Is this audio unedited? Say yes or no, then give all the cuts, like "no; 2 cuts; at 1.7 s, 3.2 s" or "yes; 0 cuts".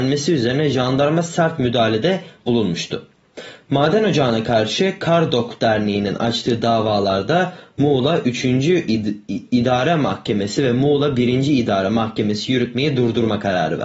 yes; 0 cuts